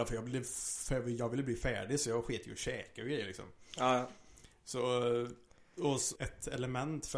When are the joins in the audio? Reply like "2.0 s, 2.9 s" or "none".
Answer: 6.2 s

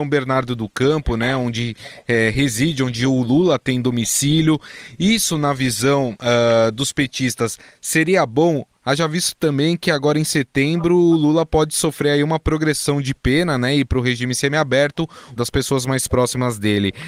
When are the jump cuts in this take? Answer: 15.4 s

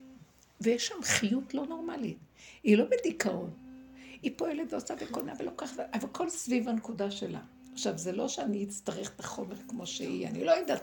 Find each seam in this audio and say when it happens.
none

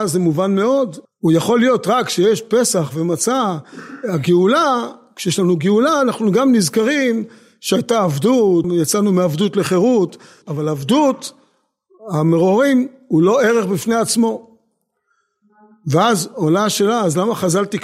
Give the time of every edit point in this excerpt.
1.0 s, 8.6 s, 10.4 s

